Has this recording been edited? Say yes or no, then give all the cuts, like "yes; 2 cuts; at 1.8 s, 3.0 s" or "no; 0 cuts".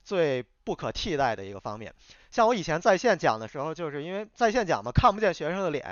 no; 0 cuts